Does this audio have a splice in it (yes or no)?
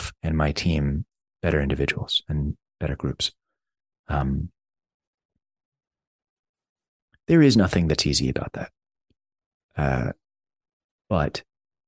no